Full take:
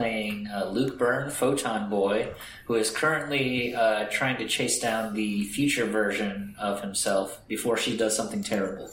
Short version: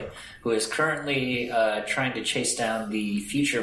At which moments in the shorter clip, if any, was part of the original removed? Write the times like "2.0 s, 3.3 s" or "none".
none